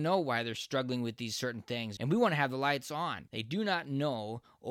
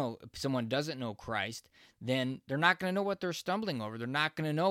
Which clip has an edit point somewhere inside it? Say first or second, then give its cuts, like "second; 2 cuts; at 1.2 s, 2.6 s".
first; 2 cuts; at 2.0 s, 3.3 s